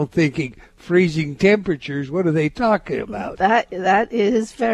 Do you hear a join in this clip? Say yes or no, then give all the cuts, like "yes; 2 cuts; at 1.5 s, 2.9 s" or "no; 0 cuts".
no; 0 cuts